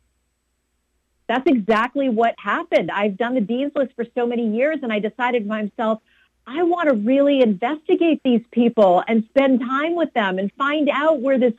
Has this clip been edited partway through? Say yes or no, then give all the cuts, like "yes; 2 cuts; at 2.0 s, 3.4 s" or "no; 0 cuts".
no; 0 cuts